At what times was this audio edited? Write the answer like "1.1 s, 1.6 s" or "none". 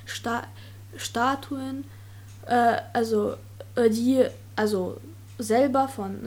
none